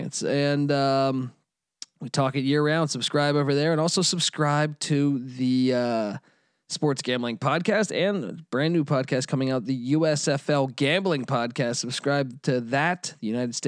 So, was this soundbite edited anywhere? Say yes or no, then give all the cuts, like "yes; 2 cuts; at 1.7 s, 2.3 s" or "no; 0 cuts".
no; 0 cuts